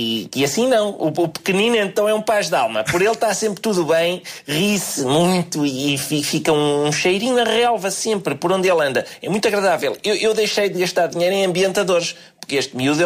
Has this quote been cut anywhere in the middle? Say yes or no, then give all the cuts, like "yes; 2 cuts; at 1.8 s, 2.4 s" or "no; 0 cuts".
no; 0 cuts